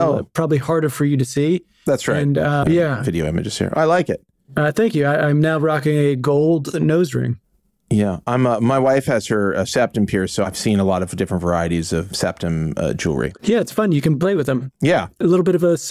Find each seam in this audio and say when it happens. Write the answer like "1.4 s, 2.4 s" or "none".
2.6 s

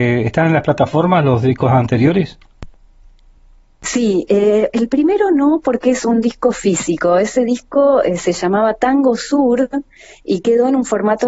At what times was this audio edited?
none

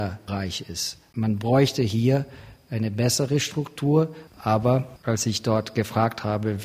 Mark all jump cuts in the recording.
4.3 s

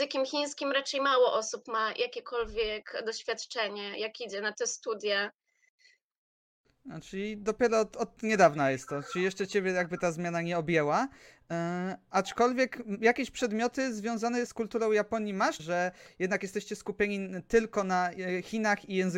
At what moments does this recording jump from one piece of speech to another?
14.5 s, 15.6 s

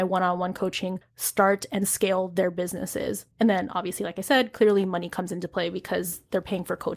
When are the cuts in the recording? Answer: 3.3 s

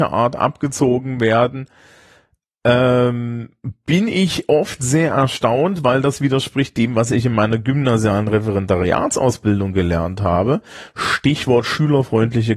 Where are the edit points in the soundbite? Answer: none

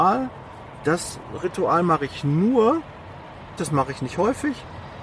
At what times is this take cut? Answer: 3.6 s

